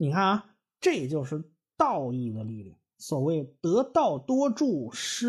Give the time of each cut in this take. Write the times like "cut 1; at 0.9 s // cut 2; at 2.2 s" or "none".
none